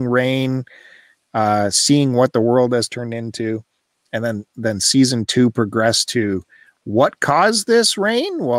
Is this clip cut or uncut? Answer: uncut